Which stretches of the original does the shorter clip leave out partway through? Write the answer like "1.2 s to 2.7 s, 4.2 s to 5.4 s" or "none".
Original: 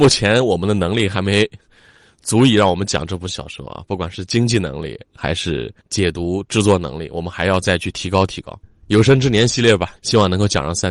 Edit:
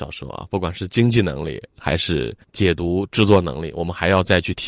none